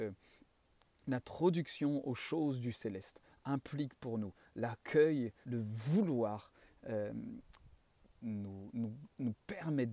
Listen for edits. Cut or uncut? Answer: cut